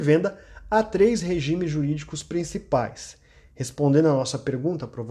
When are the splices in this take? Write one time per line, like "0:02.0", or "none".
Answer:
none